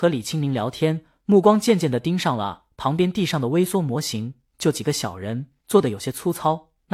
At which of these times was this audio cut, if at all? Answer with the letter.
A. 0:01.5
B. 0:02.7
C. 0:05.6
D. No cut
C